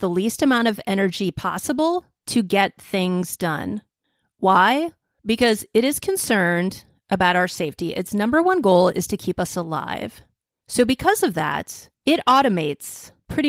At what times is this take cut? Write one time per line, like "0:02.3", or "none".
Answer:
none